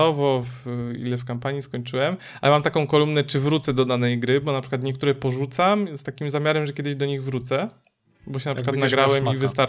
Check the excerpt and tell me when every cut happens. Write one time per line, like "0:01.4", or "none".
none